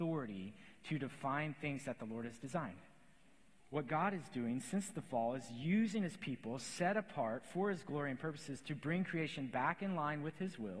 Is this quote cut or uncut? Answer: cut